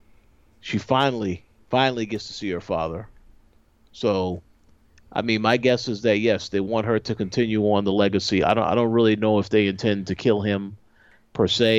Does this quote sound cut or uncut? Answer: uncut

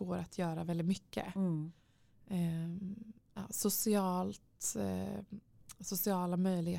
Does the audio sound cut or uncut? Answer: uncut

